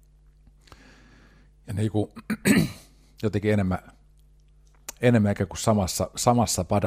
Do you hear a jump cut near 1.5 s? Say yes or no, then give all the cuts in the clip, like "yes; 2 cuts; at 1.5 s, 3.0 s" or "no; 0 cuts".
no; 0 cuts